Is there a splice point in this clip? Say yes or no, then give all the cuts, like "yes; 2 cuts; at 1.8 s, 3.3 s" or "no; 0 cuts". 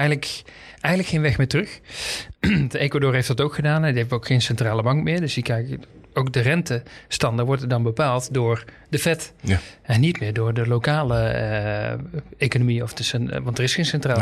no; 0 cuts